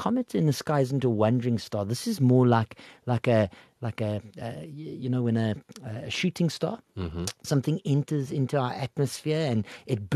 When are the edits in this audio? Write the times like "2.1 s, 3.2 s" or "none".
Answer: none